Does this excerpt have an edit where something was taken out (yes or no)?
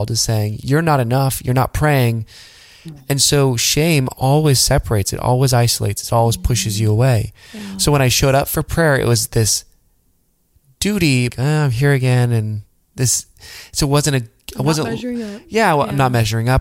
yes